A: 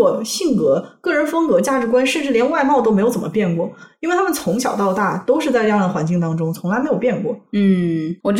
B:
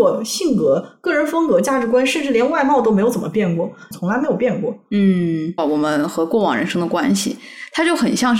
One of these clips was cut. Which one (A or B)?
B